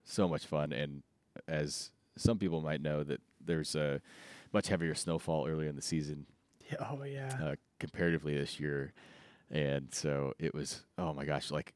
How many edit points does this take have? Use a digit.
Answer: 0